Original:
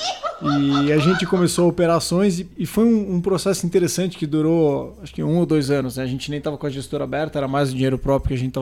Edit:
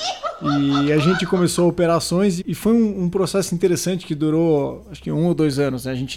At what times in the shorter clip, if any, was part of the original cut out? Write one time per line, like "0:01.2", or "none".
0:02.4